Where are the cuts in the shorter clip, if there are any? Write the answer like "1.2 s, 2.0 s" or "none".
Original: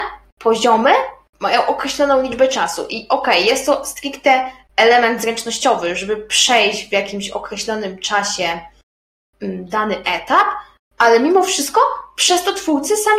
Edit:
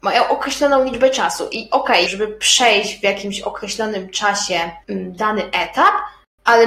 2.1 s, 4.8 s